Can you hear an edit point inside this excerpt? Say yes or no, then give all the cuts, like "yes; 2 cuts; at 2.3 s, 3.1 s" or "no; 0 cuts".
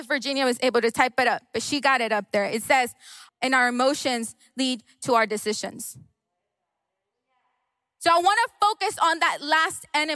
yes; 1 cut; at 3.3 s